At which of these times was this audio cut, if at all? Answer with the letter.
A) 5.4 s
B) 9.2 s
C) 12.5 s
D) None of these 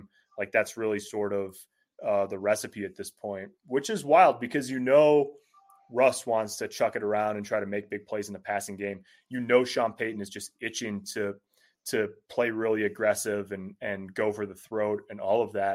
D